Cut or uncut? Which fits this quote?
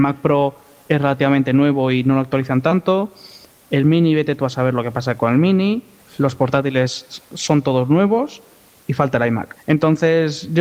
cut